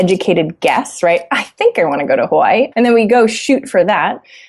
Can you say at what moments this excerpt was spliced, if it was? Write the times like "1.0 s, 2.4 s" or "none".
2.7 s